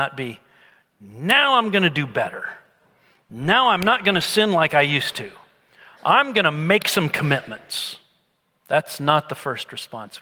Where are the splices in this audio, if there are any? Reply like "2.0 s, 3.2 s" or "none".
none